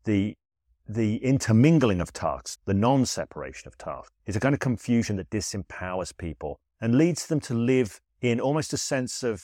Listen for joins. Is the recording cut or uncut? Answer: cut